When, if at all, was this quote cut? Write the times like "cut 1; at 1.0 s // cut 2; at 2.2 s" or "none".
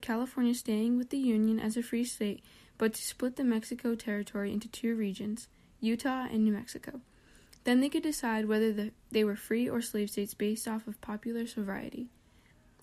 none